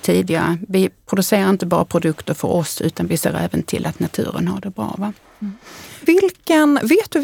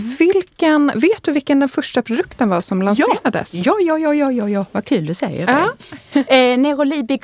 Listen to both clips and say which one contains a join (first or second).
first